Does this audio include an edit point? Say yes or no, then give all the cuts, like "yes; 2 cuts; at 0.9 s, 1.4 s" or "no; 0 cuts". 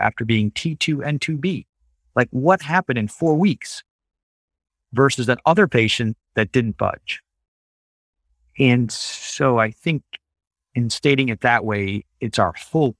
no; 0 cuts